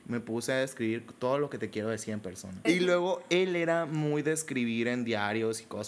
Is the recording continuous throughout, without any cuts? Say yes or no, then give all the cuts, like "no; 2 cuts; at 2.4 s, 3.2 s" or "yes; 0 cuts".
no; 1 cut; at 2.6 s